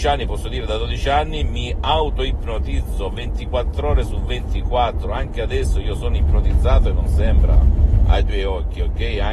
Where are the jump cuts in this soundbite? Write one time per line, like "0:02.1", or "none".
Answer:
none